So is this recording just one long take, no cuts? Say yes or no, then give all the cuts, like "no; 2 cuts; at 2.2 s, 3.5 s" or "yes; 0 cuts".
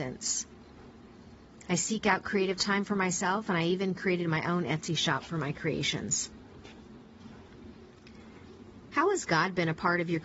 yes; 0 cuts